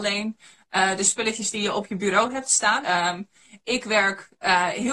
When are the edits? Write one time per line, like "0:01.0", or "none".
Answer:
0:02.8